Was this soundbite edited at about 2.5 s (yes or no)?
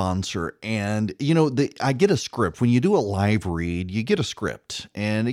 no